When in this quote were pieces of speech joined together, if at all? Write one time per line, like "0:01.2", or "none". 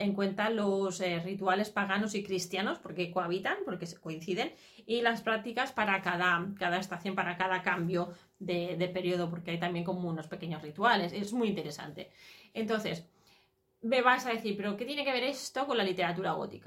none